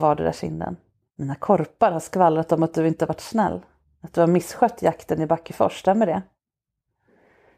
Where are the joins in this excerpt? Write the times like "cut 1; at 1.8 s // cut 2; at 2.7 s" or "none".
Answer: cut 1; at 1.0 s